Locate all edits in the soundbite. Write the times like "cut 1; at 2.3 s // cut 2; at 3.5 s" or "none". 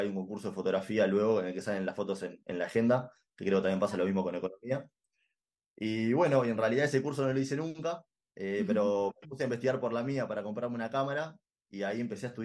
none